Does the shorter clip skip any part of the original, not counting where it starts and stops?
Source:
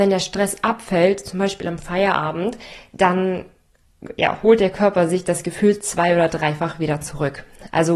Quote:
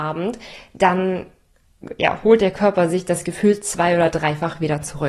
no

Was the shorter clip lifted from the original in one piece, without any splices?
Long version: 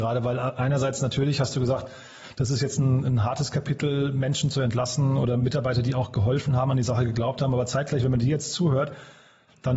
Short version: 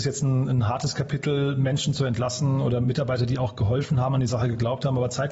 yes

